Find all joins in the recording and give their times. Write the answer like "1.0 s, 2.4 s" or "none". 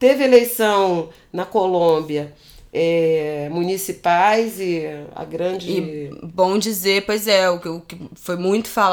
none